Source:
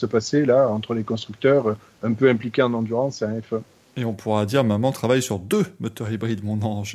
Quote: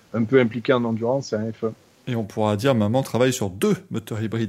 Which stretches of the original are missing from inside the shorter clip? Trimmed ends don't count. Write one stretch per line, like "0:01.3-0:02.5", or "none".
none